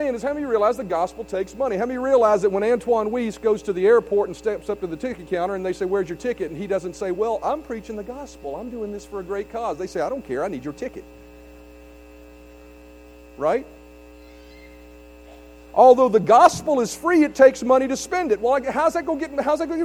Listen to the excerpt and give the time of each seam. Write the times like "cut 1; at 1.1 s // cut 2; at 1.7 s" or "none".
none